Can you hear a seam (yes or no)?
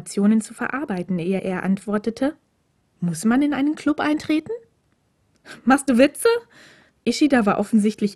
no